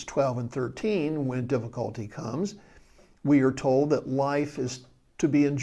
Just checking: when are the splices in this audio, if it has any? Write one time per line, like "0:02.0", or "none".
none

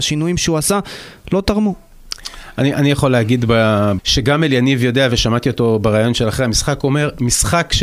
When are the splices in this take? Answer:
0:04.0

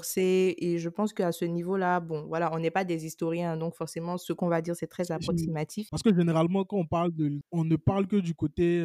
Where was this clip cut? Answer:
0:05.9
0:07.4

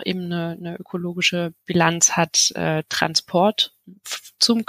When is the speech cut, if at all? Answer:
none

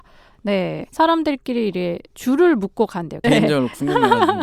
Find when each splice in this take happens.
0:00.9
0:02.1
0:03.2

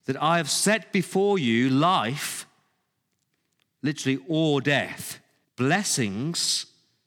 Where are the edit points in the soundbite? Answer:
0:05.4

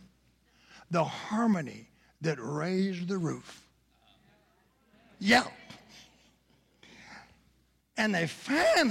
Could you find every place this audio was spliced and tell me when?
none

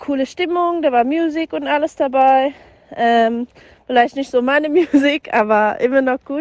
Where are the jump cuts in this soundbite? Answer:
none

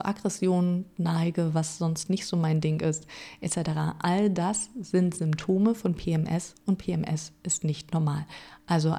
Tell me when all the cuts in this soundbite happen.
none

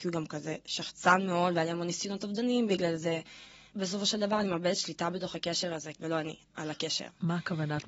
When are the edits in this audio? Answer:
0:03.7
0:06.0

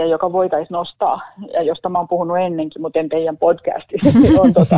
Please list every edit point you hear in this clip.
none

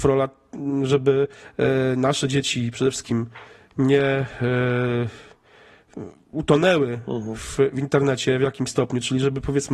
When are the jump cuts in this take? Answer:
0:06.3

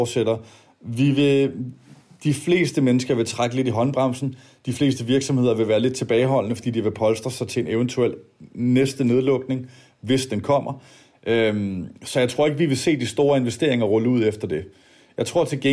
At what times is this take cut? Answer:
none

